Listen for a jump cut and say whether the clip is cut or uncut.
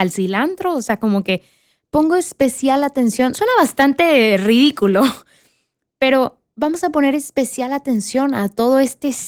uncut